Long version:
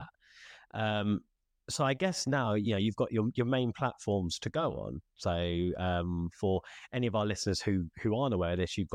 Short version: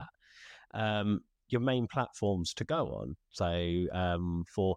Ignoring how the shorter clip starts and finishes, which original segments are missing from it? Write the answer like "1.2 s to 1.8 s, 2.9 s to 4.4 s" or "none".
1.5 s to 3.3 s